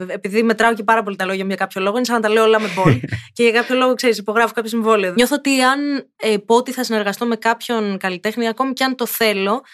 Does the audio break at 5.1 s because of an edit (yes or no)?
yes